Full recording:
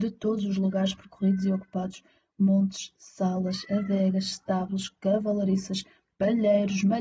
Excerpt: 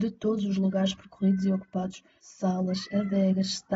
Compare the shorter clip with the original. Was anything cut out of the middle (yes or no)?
yes